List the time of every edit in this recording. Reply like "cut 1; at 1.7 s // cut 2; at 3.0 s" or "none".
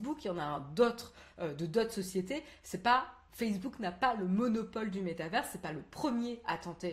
none